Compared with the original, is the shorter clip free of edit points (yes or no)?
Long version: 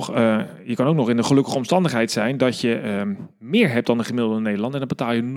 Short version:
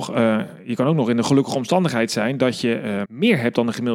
no